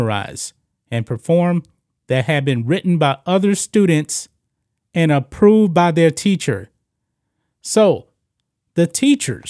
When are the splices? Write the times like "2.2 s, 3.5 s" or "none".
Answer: none

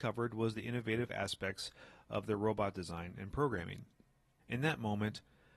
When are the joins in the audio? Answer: 4.4 s

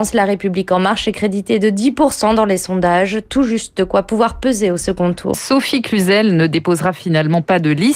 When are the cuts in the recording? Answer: 5.3 s

